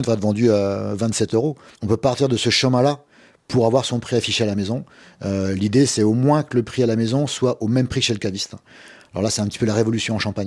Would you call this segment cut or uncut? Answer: cut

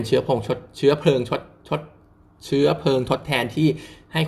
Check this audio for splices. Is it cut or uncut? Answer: uncut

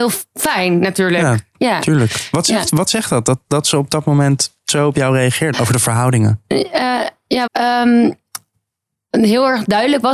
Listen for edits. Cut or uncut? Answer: cut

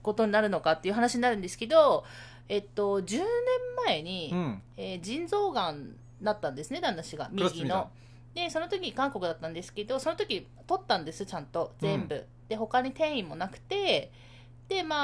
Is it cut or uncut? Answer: uncut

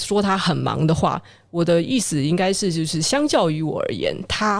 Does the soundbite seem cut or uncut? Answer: uncut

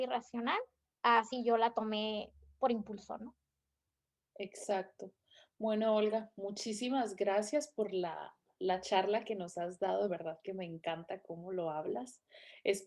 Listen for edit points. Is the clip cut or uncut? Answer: uncut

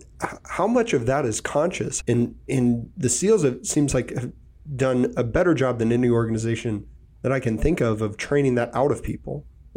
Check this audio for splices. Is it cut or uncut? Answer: cut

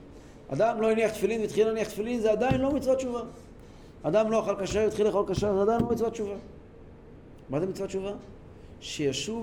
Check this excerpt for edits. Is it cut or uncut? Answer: uncut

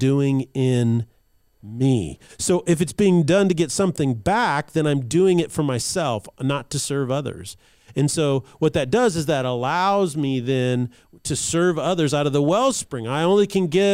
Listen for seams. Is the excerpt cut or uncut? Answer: cut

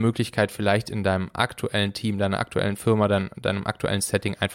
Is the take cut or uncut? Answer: uncut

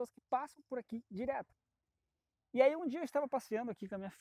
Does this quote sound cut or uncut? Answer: uncut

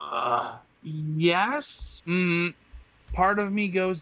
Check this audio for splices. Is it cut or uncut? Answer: cut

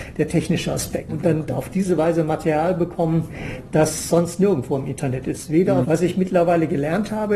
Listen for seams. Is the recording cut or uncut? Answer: cut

